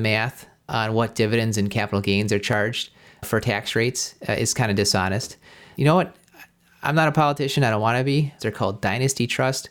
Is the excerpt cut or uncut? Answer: cut